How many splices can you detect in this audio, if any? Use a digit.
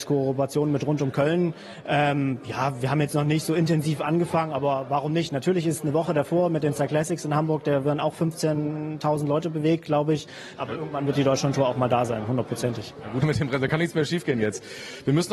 2